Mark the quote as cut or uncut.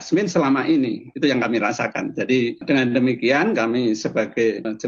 uncut